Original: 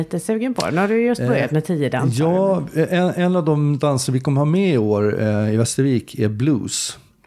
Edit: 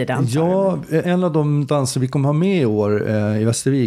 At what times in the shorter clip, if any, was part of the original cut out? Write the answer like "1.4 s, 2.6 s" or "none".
1.0 s